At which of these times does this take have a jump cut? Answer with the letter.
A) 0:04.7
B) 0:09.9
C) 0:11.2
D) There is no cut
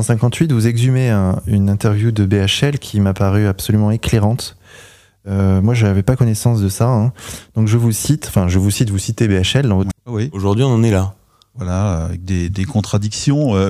B